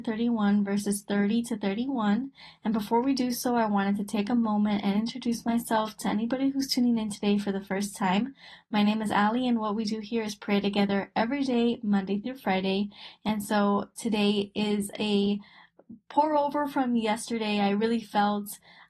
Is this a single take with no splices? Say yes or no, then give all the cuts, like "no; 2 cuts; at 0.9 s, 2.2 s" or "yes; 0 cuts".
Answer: yes; 0 cuts